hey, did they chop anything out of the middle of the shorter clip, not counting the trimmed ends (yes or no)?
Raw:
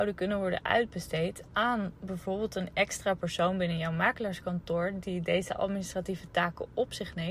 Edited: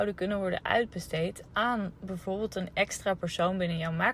no